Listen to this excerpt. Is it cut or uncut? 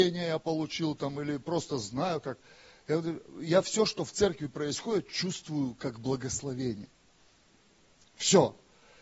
uncut